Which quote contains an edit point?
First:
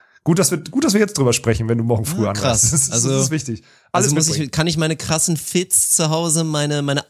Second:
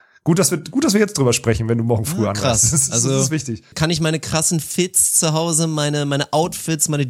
second; 1 cut; at 3.7 s

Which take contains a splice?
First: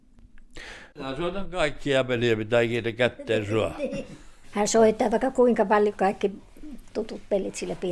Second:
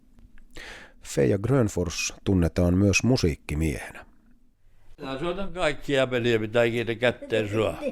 first; 2 cuts; at 0.9 s, 4.4 s

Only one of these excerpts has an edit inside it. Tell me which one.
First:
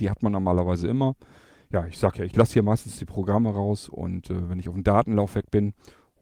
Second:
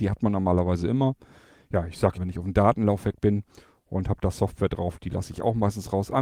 second; 1 cut; at 2.2 s

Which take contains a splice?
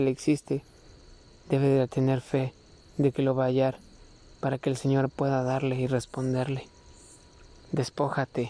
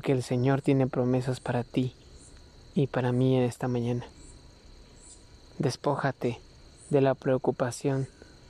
first; 1 cut; at 7.6 s

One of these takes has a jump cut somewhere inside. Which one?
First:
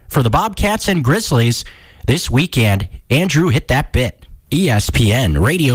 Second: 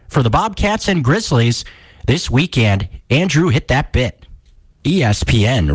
first; 1 cut; at 4.4 s

